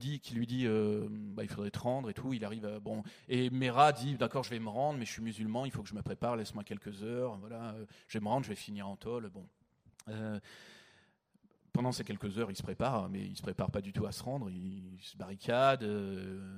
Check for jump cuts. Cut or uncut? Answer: uncut